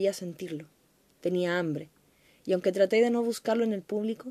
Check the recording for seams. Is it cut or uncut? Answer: uncut